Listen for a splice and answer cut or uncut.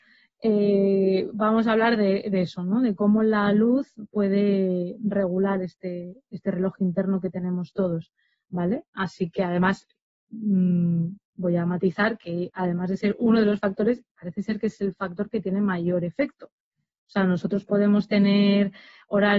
uncut